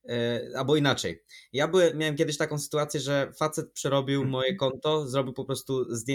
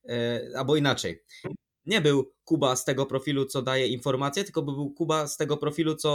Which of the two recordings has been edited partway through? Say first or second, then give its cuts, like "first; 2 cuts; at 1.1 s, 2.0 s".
second; 1 cut; at 1.4 s